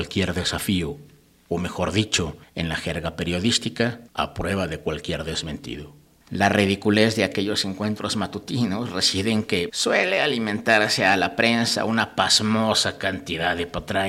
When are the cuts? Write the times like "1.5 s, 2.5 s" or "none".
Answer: 6.3 s, 9.7 s